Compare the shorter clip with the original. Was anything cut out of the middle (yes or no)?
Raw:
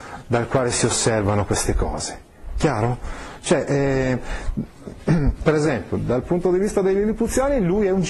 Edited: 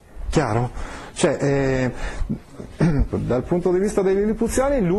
yes